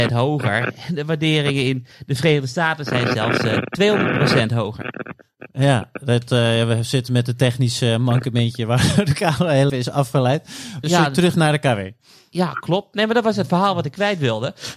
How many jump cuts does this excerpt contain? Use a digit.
2